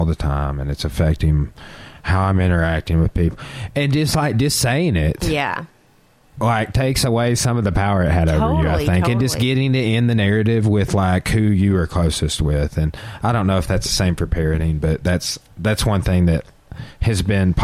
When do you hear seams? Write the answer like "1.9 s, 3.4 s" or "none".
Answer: none

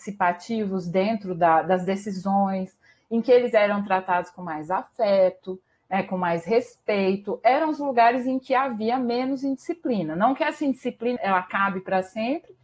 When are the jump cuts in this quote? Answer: 11.2 s

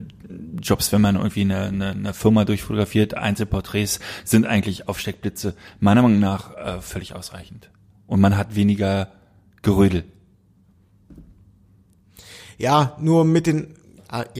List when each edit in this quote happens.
none

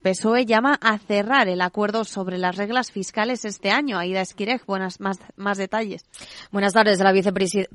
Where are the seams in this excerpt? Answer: none

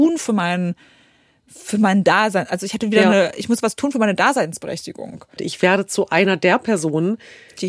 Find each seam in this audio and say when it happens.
5.4 s

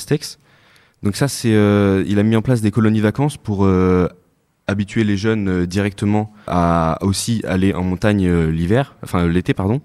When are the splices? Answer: 6.5 s

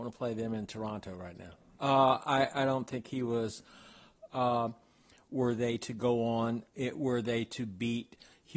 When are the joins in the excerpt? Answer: 1.8 s, 4.3 s

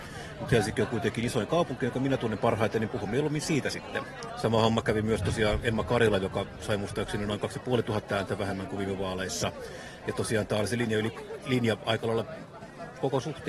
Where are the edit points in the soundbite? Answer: 4.3 s

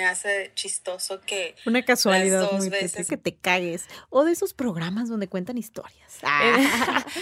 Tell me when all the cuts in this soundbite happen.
3.1 s

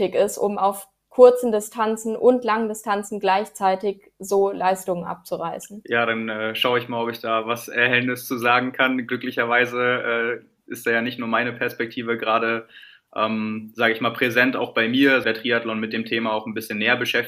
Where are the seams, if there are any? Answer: 15.2 s

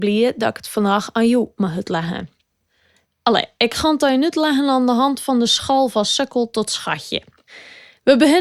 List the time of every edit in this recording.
3.0 s

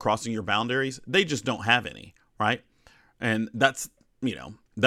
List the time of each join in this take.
none

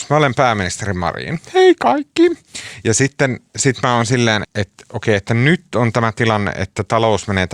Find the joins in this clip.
4.4 s

